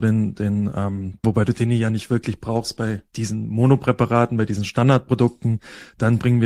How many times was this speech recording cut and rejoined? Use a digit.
2